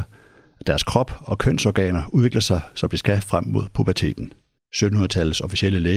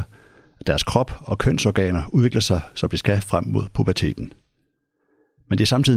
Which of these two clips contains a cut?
first; 1 cut; at 4.6 s

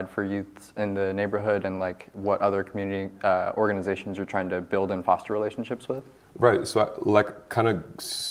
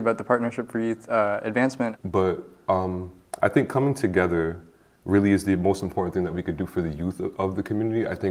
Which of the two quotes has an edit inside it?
second; 1 cut; at 2.0 s

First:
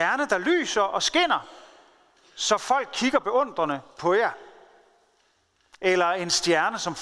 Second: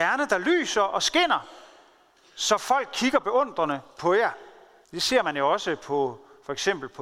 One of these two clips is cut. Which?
second; 1 cut; at 4.8 s

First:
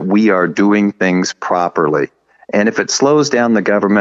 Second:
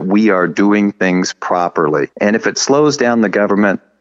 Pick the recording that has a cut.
second; 1 cut; at 2.1 s

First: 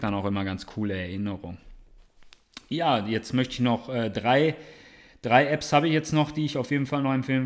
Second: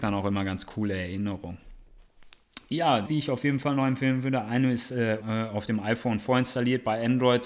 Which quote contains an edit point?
second; 2 cuts; at 3.0 s, 5.2 s

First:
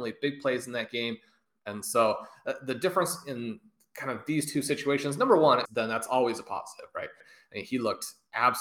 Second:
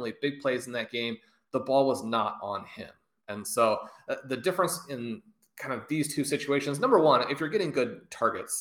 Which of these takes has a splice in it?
first; 3 cuts; at 1.5 s, 5.7 s, 7.2 s

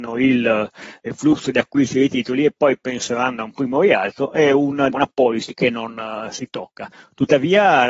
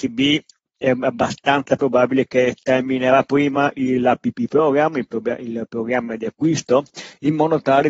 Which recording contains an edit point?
first; 1 cut; at 4.9 s

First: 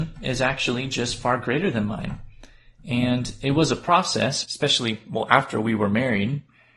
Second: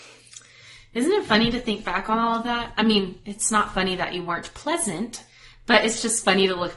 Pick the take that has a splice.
first; 1 cut; at 4.4 s

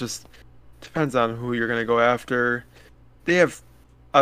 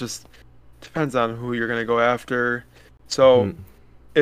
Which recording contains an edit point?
second; 1 cut; at 2.9 s

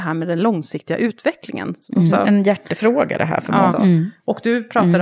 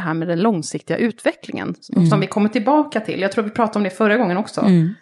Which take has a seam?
first; 2 cuts; at 2.1 s, 3.7 s

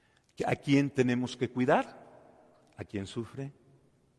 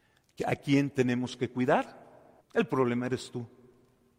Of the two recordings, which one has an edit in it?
second; 1 cut; at 2.4 s

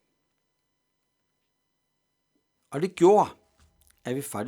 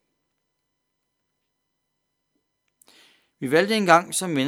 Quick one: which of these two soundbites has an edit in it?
first; 1 cut; at 2.6 s

